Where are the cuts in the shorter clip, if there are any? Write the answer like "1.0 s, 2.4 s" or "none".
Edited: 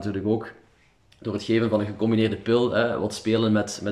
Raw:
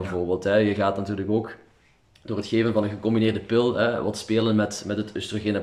none